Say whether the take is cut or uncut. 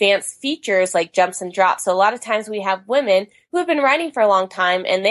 uncut